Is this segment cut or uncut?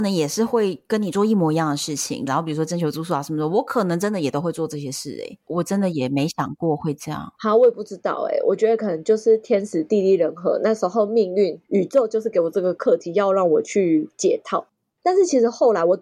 cut